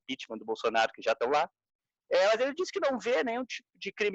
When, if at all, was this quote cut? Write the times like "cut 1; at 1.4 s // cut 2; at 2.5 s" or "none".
none